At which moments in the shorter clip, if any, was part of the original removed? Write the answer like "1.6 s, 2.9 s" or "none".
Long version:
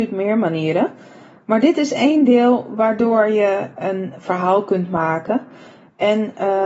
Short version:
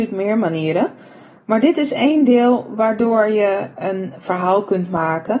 none